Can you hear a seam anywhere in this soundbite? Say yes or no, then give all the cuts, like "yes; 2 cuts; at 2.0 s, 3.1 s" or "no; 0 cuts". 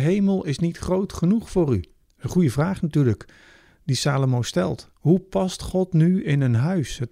yes; 1 cut; at 2.0 s